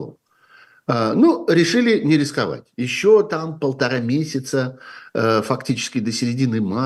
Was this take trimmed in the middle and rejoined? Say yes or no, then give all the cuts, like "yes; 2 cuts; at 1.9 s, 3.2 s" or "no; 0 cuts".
no; 0 cuts